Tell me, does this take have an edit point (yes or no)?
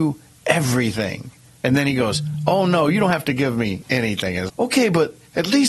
yes